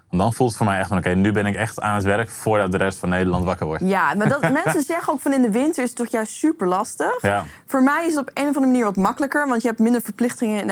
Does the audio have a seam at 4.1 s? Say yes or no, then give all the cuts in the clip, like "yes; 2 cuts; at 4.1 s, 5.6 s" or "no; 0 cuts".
no; 0 cuts